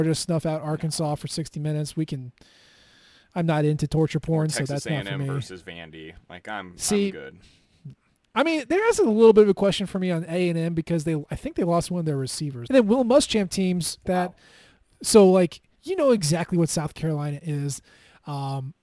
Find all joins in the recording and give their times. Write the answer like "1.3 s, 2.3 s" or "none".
12.7 s, 14.0 s, 15.7 s